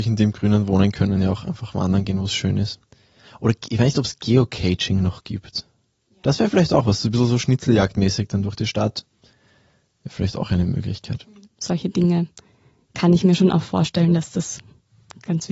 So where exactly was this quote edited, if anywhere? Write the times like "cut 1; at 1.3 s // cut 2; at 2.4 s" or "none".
cut 1; at 11.4 s